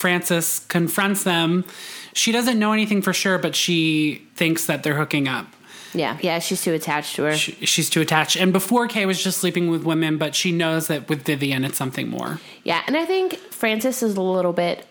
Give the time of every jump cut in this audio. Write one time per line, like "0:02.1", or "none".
0:04.3
0:06.2